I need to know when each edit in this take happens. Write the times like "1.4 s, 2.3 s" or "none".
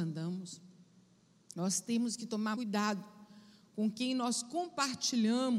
2.5 s

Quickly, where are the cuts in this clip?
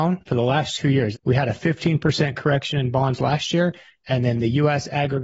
1.1 s

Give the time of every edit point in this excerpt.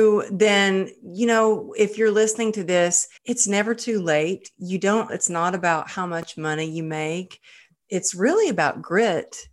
3.2 s, 5.1 s

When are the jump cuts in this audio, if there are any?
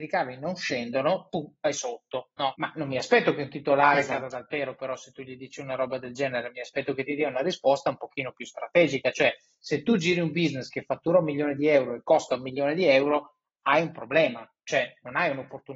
2.6 s

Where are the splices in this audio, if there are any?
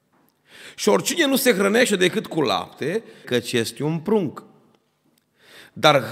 3.2 s

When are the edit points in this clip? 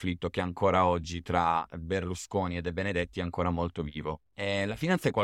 4.3 s

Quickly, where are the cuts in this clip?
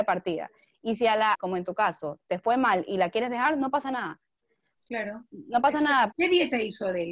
1.3 s, 6.1 s

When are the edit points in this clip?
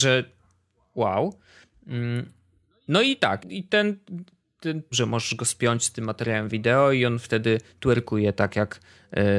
3.4 s, 4.9 s

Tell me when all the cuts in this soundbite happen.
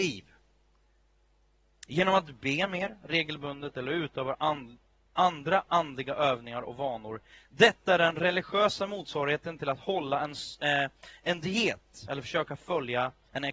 none

